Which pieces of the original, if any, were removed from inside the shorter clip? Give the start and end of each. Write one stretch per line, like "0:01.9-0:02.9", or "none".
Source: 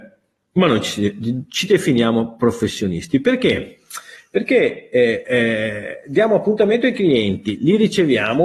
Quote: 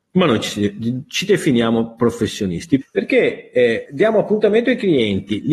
0:03.2-0:04.2
0:05.2-0:06.0